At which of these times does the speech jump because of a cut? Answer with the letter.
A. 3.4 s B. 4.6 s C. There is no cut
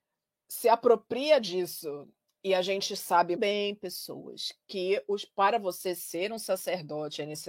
A